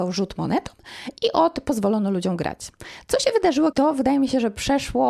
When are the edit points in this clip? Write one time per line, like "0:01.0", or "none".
0:03.7

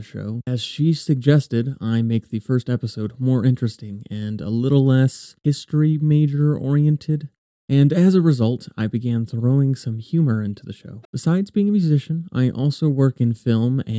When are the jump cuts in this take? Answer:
0:11.0

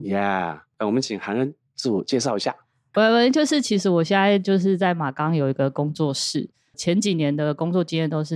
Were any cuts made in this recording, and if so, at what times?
0:02.9
0:06.7

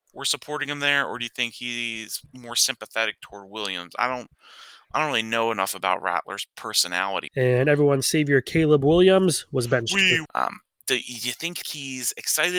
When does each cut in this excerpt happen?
0:07.3
0:10.3
0:11.6

